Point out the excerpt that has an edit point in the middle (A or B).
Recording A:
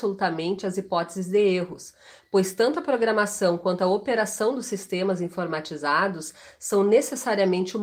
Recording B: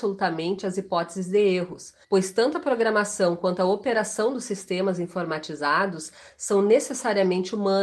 B